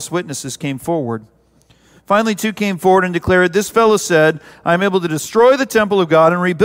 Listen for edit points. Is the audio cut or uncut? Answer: uncut